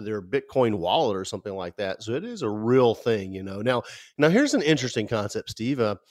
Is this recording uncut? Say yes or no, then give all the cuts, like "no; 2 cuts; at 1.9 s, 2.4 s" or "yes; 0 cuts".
yes; 0 cuts